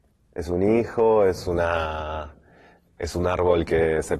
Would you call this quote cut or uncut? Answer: uncut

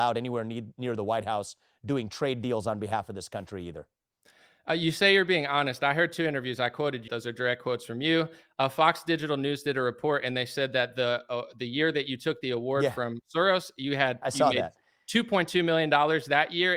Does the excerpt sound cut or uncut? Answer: cut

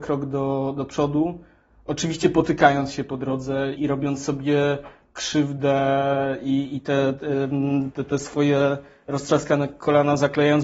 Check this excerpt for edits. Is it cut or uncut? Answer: cut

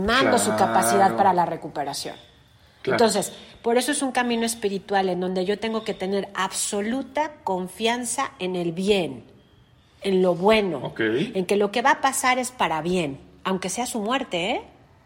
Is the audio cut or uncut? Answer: uncut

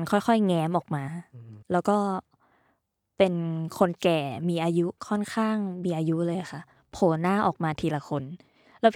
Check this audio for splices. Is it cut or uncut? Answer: cut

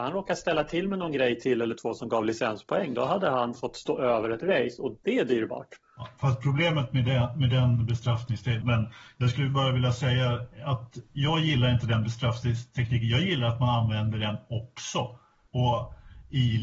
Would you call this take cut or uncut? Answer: cut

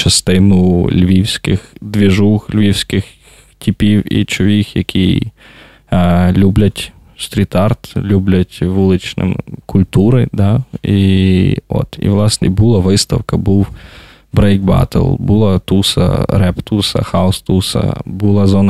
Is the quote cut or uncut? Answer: cut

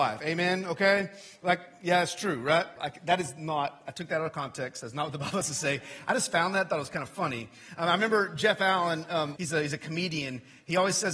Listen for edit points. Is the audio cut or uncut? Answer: cut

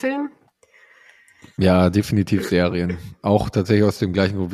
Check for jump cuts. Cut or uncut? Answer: uncut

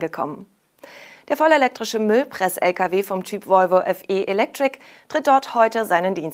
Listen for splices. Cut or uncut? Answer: uncut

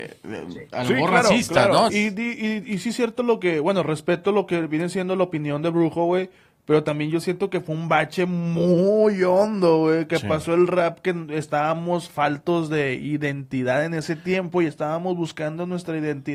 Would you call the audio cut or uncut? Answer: cut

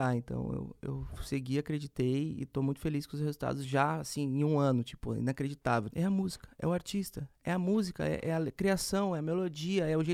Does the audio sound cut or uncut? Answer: cut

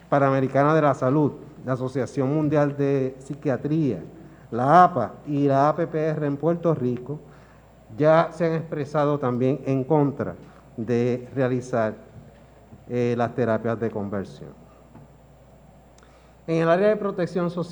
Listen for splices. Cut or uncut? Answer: uncut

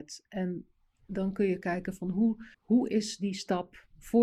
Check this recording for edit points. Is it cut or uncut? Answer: cut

